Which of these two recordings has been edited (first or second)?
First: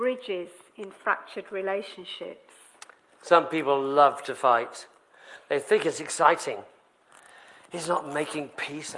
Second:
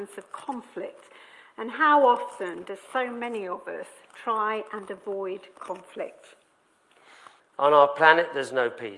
second